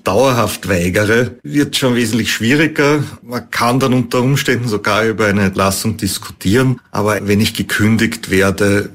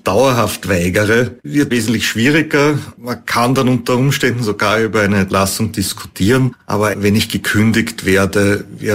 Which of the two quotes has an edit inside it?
second; 1 cut; at 1.7 s

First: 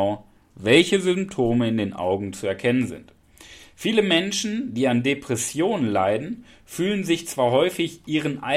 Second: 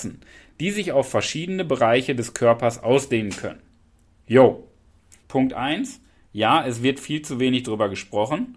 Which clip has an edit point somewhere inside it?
second; 1 cut; at 5.2 s

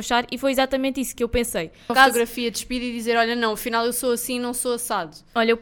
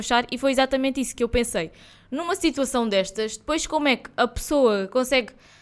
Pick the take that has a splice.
first; 1 cut; at 1.9 s

